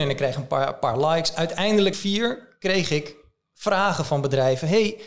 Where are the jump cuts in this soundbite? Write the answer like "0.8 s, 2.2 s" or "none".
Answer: 1.9 s